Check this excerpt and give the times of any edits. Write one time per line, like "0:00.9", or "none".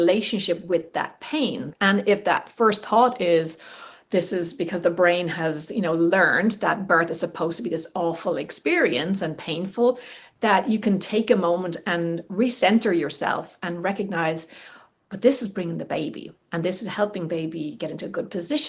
0:01.7